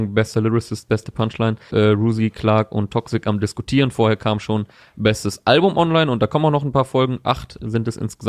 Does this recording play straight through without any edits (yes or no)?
no